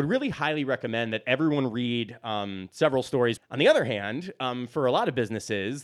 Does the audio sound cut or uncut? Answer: cut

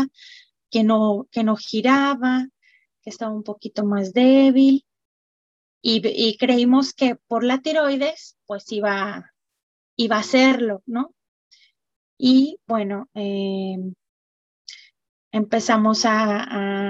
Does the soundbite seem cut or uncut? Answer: cut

